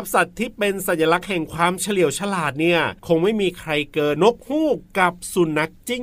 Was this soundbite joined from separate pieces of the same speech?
yes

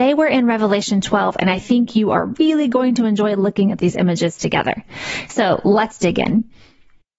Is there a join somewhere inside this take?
no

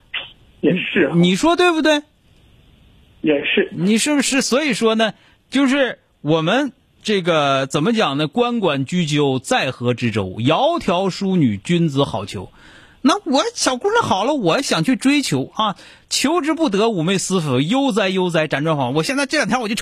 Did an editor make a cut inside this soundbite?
no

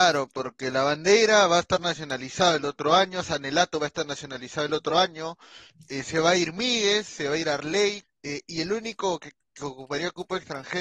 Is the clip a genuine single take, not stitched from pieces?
no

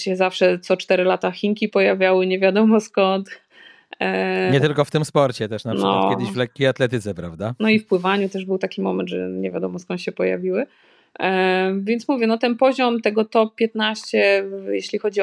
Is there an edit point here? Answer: no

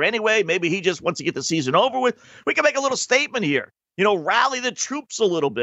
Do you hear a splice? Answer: no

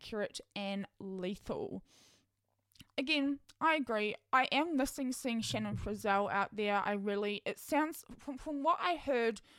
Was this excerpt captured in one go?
yes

